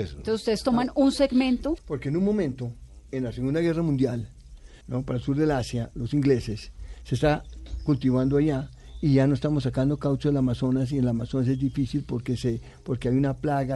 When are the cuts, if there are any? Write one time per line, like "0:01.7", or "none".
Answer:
0:01.8
0:04.8